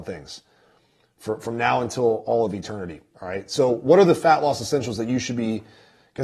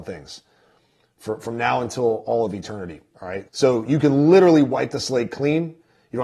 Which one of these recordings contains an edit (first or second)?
second